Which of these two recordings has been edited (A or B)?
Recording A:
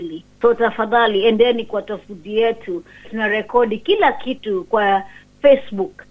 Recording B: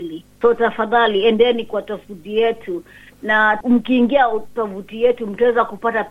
A